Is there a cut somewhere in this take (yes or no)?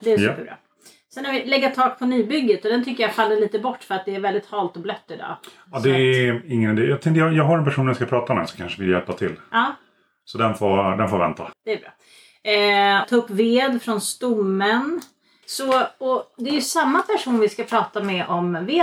yes